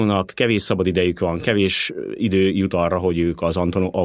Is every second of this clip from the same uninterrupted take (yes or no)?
yes